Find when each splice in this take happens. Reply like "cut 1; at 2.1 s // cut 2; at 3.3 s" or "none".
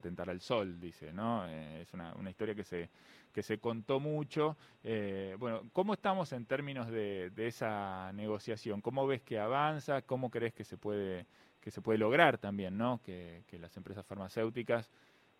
none

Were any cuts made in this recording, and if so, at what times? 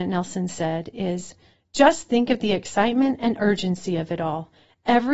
none

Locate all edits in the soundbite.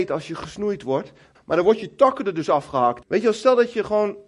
cut 1; at 1.3 s // cut 2; at 3.0 s

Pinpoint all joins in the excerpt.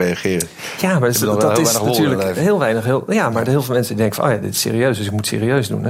none

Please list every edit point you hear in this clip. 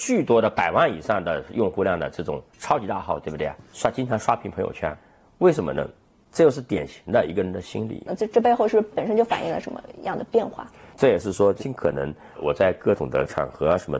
cut 1; at 8.1 s // cut 2; at 10.9 s

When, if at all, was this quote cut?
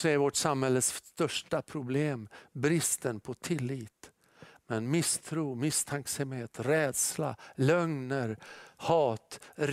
cut 1; at 4.6 s

